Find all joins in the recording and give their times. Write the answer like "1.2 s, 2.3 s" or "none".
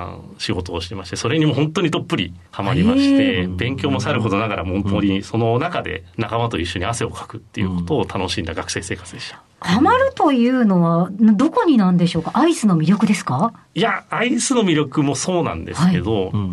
2.5 s